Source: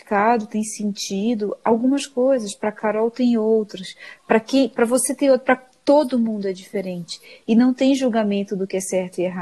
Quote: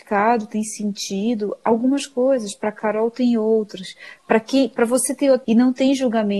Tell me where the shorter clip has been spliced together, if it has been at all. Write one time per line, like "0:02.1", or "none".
0:05.4